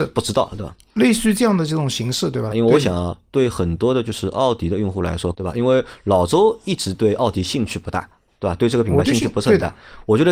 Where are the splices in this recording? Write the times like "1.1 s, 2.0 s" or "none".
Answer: 2.5 s, 5.3 s

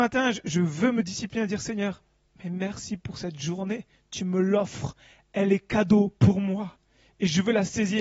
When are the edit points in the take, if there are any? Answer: none

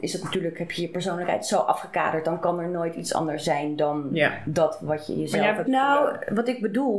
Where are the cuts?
5.7 s

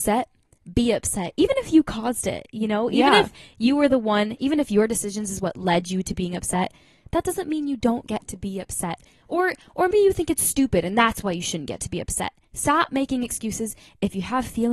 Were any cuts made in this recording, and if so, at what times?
9.9 s

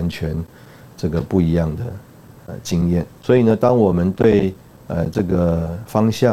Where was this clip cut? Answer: 3.2 s

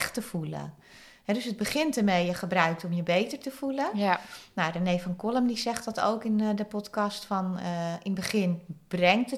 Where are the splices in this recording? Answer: none

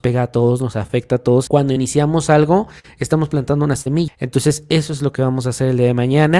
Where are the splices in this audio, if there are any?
1.5 s, 4.1 s

